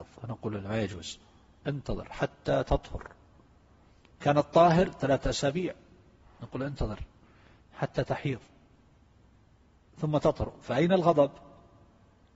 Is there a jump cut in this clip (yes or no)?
no